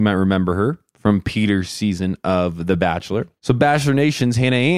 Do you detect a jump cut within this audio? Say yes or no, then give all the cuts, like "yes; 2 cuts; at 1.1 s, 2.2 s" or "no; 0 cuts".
yes; 1 cut; at 3.4 s